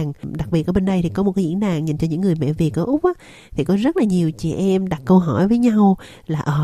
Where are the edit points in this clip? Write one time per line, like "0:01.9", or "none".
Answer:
none